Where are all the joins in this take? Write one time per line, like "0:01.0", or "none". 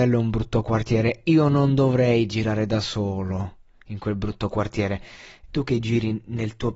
0:05.5